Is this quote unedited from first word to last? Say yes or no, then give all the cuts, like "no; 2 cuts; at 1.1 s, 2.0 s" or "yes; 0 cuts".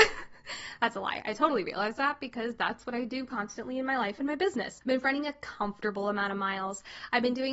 no; 1 cut; at 4.8 s